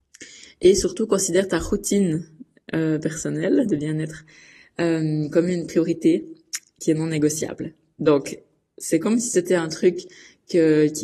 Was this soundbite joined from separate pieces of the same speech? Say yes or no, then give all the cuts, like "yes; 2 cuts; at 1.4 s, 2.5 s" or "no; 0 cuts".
no; 0 cuts